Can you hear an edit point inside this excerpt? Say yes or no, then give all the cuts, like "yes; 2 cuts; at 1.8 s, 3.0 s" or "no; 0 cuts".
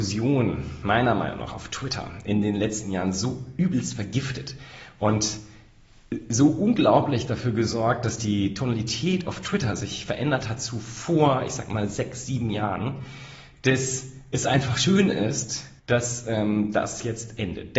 yes; 1 cut; at 15.8 s